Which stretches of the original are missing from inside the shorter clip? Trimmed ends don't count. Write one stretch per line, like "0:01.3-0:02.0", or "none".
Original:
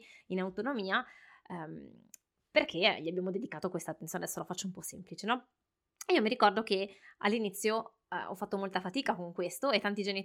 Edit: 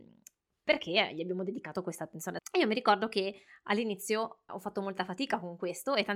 0:04.3-0:05.9
0:08.0-0:08.2